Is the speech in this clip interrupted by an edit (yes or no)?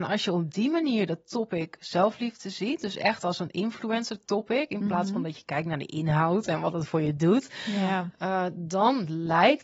no